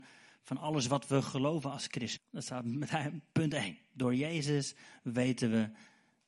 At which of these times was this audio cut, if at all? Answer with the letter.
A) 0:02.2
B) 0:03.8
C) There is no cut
A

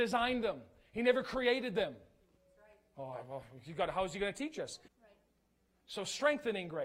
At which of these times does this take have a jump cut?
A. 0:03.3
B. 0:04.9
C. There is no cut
B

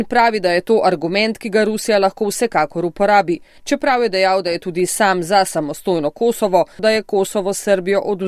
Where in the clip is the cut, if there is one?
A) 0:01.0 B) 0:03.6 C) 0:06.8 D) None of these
C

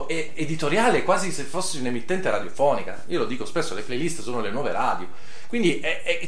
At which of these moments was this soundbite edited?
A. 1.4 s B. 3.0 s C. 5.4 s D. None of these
D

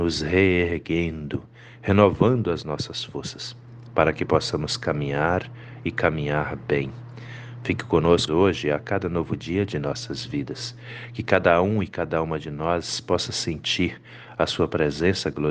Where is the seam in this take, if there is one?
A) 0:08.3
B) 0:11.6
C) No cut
A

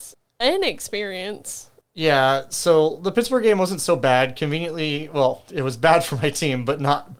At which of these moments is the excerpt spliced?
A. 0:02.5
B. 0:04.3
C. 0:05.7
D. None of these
D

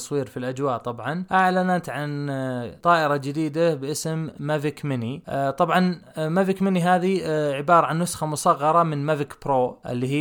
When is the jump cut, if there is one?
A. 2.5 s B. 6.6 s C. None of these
C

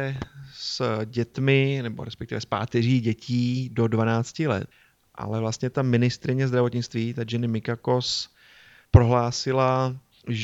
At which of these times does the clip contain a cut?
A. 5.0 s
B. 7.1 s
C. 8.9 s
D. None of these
C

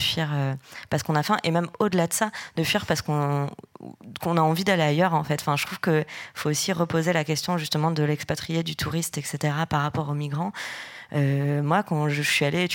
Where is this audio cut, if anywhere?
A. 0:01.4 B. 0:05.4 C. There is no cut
C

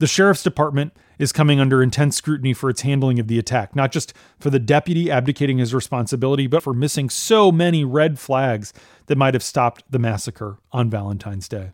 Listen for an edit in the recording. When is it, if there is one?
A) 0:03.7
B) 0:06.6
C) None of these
B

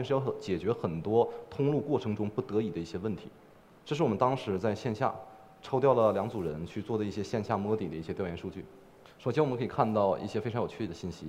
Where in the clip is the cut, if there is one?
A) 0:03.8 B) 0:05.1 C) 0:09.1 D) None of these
D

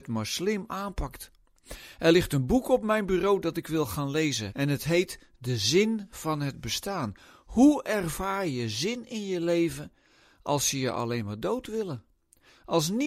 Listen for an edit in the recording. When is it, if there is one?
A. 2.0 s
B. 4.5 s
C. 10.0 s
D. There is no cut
B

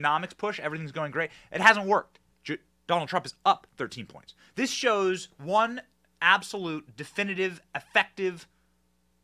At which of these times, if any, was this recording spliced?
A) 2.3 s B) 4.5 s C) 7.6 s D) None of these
A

